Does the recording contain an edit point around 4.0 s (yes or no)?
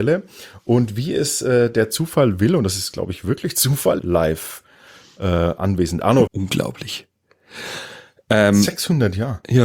yes